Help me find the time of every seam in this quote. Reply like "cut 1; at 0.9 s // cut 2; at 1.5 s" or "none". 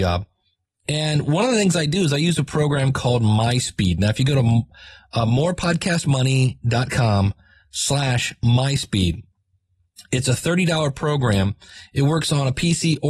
none